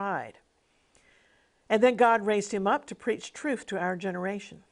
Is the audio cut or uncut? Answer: uncut